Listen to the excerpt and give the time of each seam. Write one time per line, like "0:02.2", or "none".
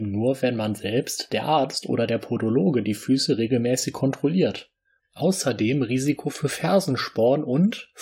0:05.0